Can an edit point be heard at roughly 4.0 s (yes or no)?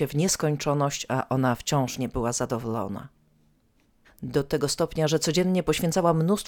yes